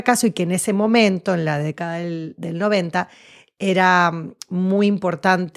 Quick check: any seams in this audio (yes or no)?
no